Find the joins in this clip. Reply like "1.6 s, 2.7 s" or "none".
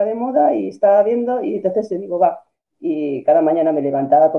2.6 s